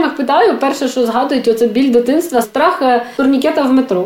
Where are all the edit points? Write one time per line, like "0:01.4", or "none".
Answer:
0:02.4